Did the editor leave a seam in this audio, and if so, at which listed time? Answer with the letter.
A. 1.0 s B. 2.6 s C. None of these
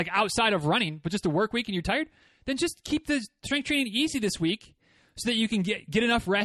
C